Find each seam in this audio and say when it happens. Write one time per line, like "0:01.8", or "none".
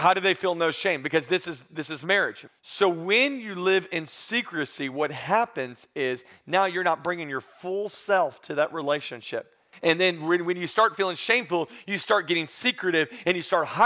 0:02.5
0:09.7